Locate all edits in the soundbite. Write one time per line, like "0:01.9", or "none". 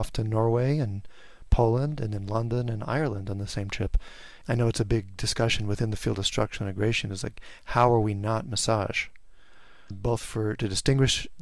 0:04.4
0:09.9